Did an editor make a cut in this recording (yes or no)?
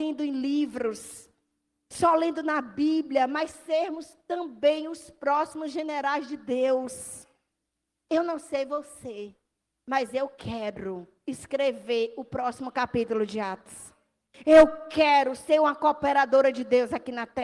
no